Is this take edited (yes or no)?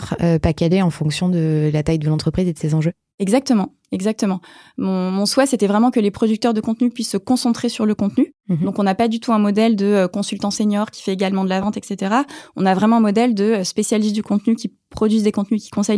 yes